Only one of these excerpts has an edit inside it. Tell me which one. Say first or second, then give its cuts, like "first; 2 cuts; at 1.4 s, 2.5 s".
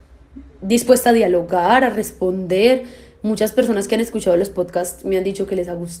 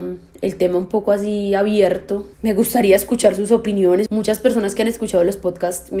second; 2 cuts; at 2.3 s, 4.1 s